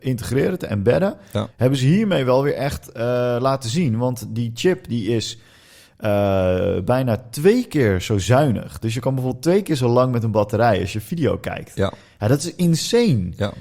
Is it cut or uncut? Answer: cut